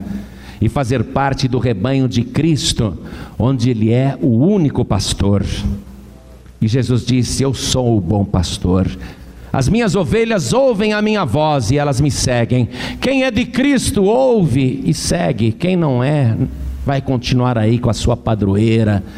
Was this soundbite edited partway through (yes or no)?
no